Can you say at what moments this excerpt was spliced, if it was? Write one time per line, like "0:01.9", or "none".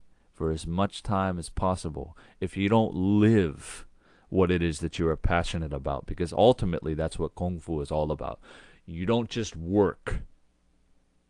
none